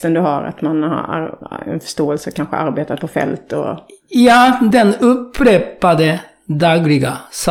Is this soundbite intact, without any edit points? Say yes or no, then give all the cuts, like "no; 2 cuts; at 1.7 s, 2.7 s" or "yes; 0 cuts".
no; 1 cut; at 4.7 s